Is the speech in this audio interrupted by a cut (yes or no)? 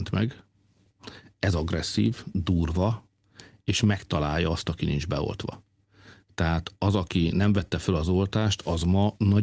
no